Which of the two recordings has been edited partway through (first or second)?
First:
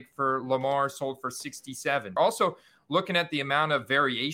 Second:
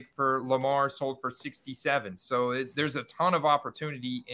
first